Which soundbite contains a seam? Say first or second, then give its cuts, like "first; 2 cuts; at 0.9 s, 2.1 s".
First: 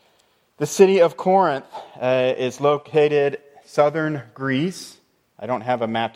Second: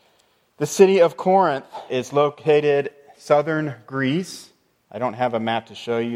second; 1 cut; at 1.9 s